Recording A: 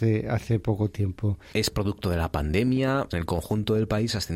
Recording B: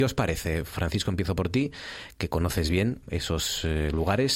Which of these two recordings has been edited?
A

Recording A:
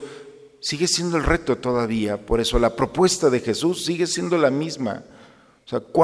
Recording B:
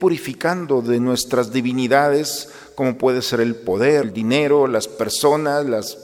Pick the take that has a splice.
B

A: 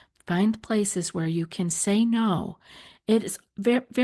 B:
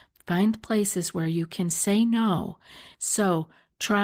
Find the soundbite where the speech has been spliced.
B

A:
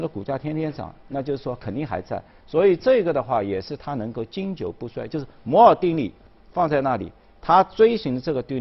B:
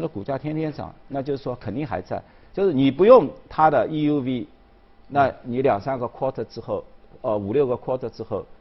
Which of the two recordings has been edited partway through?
A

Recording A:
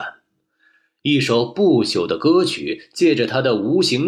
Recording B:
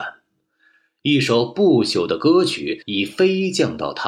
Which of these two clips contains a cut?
B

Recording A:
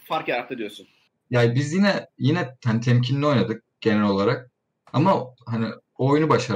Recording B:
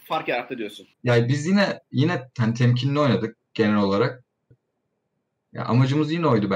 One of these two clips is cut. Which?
B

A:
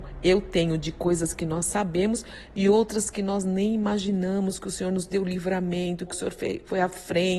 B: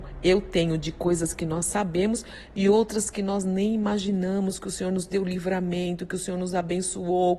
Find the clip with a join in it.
A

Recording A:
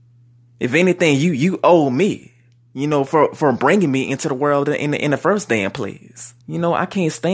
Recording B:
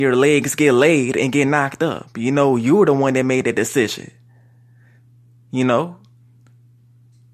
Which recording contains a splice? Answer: A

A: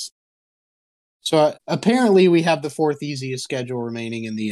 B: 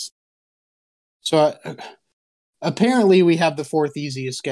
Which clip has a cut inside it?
A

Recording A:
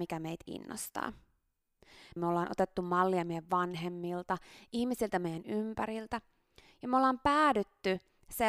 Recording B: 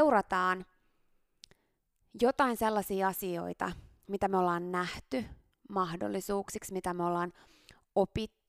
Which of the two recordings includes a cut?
A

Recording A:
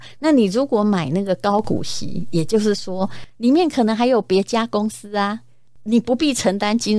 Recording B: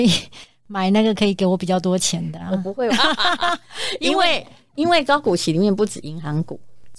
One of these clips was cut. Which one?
B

